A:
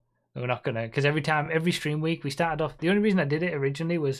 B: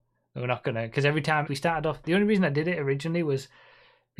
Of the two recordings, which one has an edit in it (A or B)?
B